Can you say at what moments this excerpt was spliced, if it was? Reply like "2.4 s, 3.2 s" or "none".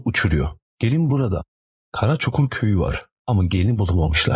1.7 s, 3.2 s

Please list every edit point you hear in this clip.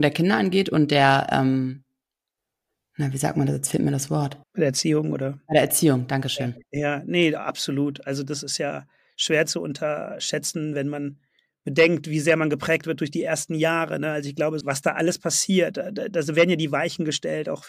4.4 s, 14.6 s

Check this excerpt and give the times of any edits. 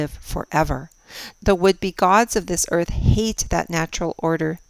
1.3 s

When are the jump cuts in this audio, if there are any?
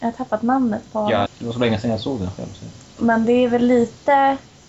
1.3 s, 3.0 s

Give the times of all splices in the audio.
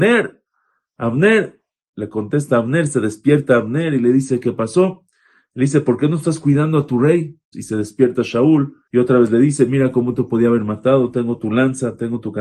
7.5 s, 8.9 s

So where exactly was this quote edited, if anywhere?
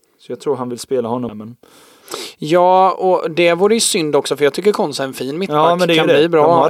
1.3 s

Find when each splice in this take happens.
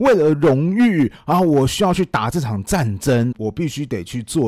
3.3 s

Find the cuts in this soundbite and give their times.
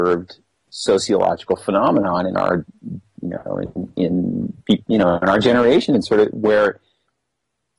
none

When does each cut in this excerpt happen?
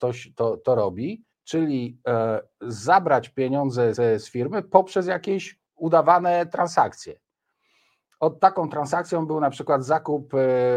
1.3 s, 4.0 s, 5.7 s

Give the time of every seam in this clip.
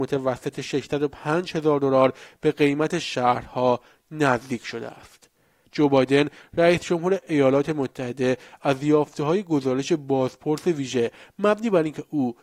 5.6 s

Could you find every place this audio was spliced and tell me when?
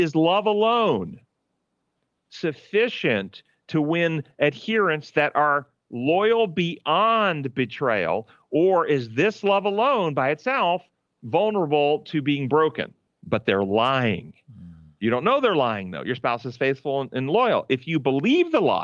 13.1 s

